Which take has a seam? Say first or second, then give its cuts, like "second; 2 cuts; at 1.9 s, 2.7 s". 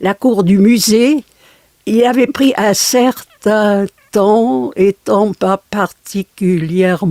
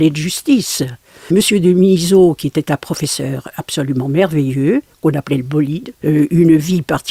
second; 2 cuts; at 1.3 s, 6.0 s